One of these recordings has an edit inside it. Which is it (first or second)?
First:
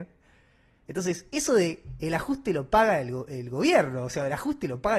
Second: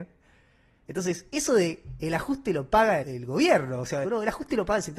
second